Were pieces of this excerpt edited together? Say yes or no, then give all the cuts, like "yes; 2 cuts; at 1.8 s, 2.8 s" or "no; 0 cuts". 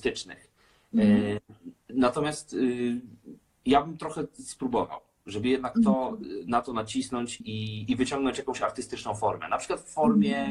yes; 1 cut; at 7.4 s